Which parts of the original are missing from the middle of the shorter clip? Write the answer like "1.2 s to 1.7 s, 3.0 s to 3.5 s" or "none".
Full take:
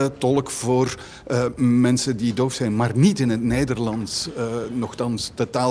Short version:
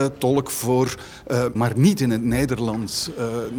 1.6 s to 2.7 s

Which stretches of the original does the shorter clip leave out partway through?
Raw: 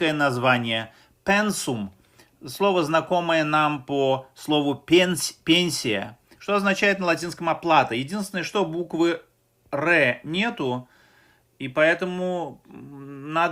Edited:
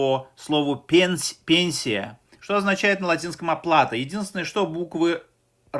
none

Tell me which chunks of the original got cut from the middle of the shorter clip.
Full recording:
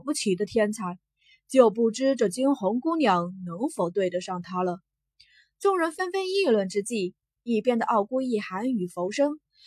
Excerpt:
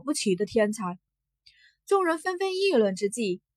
1.1 s to 4.8 s

